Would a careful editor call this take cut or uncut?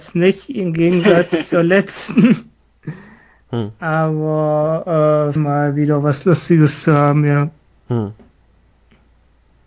cut